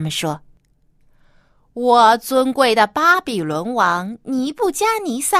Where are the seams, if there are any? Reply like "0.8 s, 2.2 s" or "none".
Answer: none